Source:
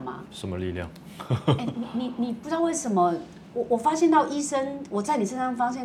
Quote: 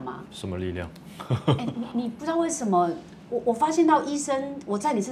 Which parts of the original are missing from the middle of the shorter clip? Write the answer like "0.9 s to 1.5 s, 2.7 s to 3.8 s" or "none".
1.9 s to 2.2 s